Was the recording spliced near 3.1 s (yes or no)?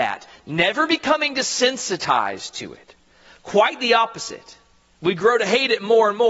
no